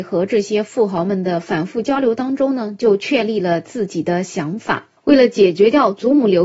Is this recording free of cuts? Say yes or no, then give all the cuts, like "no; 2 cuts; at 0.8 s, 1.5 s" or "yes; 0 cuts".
yes; 0 cuts